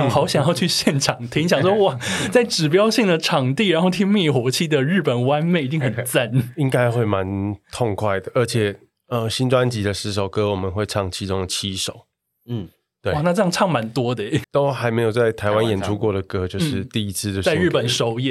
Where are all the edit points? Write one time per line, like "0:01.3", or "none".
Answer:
0:14.4

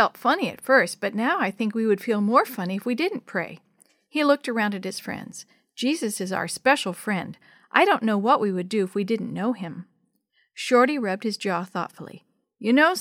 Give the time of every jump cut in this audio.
none

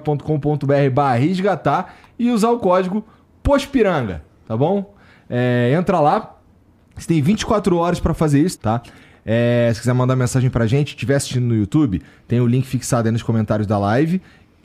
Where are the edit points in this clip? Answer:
0:08.6

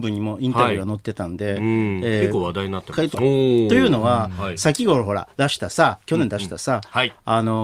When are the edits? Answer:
0:03.1

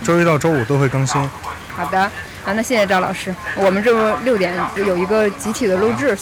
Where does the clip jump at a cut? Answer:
none

